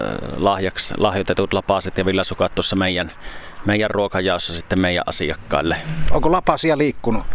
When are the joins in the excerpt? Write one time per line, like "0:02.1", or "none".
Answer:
none